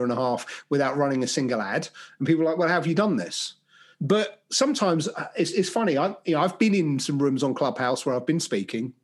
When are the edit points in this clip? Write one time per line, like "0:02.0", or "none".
0:03.9